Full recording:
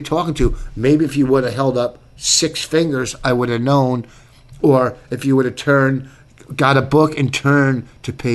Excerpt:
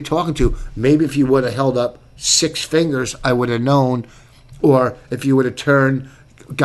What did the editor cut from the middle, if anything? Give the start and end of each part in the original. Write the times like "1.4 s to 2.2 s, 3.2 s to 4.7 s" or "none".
none

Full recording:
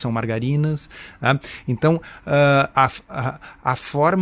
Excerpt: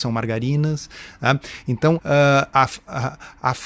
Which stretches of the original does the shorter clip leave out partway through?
2.0 s to 2.2 s

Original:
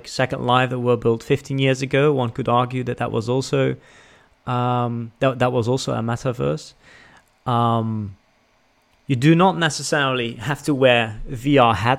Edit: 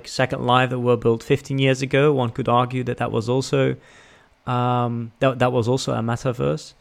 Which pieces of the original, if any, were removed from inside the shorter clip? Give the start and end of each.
none

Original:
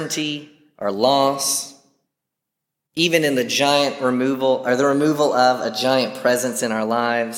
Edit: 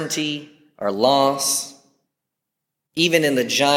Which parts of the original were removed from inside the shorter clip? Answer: none

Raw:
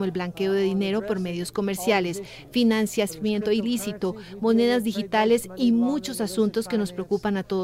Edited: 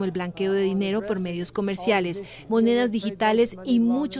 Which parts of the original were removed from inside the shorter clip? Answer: 2.5 s to 4.4 s

